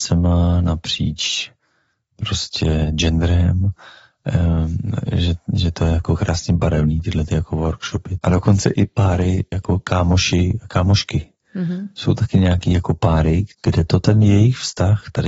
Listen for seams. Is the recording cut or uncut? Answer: uncut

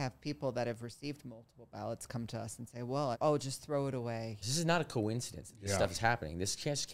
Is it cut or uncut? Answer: cut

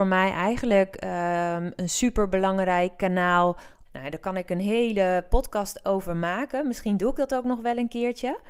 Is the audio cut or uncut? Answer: cut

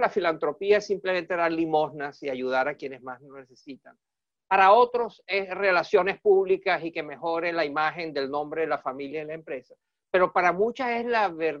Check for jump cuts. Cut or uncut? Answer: uncut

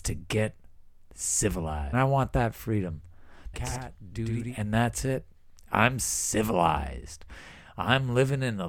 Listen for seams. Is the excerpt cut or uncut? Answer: cut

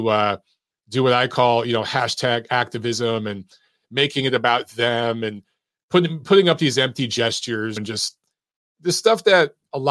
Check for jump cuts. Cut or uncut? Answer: cut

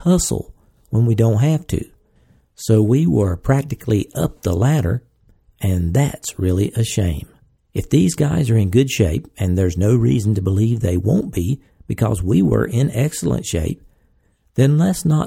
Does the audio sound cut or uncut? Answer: cut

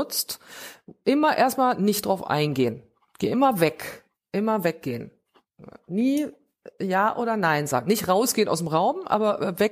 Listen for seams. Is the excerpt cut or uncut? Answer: uncut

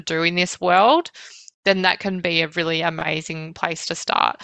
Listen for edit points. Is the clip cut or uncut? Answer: uncut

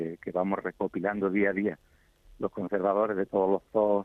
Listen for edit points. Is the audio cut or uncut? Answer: uncut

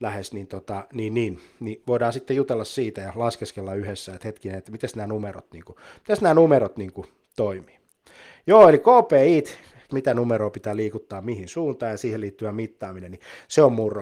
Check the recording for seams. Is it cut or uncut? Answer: cut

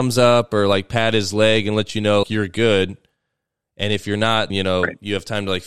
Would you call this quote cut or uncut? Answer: cut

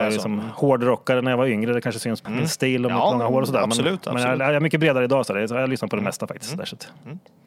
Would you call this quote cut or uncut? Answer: cut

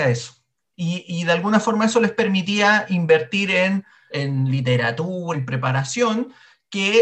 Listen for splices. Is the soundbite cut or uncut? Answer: cut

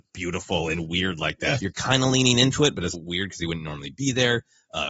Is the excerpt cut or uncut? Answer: cut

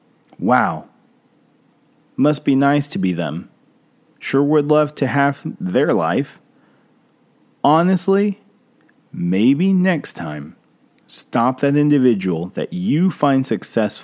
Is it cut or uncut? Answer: uncut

